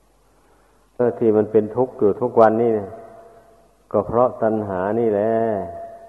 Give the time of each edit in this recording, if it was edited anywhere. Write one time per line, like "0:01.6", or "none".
0:01.0